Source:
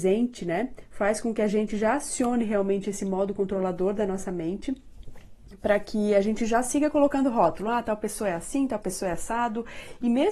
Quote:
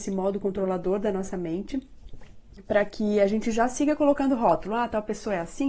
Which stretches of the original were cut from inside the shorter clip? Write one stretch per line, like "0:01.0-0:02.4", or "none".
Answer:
none